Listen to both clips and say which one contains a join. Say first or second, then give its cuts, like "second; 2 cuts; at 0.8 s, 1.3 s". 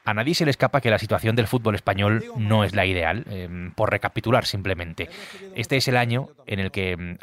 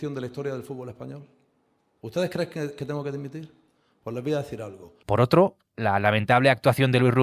second; 1 cut; at 5.0 s